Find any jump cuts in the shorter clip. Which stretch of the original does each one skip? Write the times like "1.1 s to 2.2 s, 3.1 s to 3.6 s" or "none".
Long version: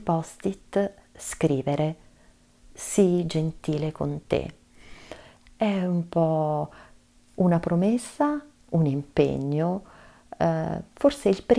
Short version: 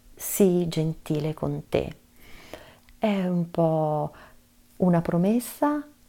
none